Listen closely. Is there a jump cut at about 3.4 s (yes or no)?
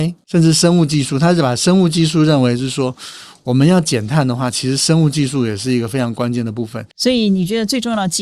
no